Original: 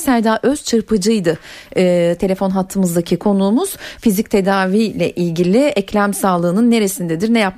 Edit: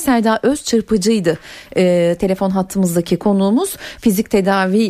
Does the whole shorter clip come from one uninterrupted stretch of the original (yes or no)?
yes